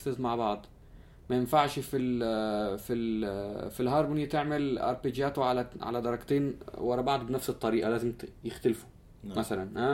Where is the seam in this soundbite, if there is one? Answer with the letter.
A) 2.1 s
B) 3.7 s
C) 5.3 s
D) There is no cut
D